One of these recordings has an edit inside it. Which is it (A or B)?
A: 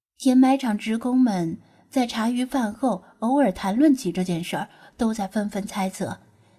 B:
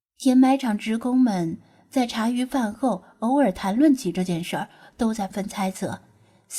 B